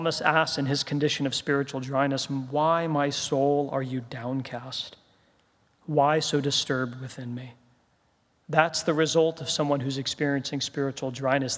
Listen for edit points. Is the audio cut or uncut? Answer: uncut